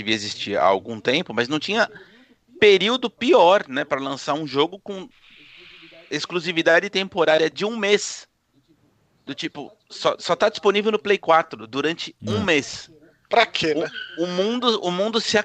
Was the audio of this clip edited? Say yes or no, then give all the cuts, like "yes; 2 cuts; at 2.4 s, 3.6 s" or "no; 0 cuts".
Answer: no; 0 cuts